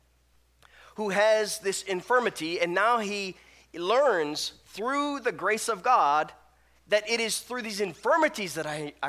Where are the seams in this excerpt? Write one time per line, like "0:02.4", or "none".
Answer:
none